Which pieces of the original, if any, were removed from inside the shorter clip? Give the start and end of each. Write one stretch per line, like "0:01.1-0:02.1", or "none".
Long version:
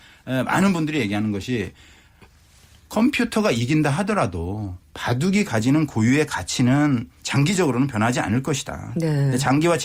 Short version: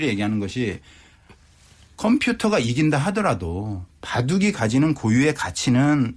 none